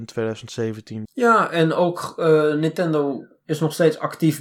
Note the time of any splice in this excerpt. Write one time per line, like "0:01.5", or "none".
0:01.0